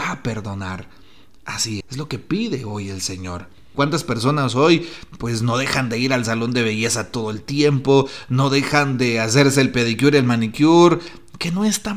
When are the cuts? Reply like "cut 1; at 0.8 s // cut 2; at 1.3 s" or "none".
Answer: cut 1; at 1.8 s // cut 2; at 3.7 s